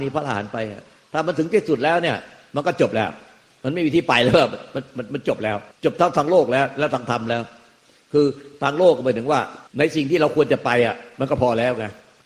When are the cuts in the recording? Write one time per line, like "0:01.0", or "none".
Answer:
0:05.7
0:09.7